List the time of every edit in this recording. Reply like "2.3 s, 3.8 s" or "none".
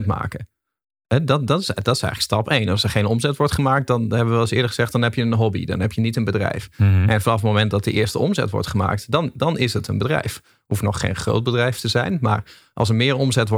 none